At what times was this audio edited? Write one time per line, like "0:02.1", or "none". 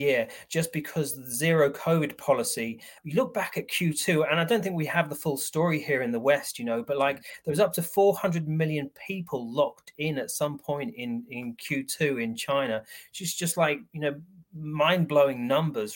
0:03.0